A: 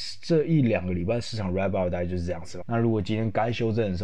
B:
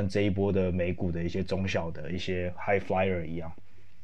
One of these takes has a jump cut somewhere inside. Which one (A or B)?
A